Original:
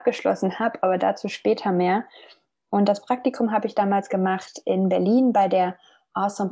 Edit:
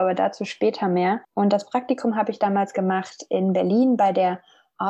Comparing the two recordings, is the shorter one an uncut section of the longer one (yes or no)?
no